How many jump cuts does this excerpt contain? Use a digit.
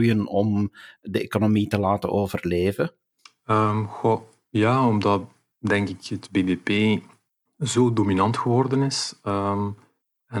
0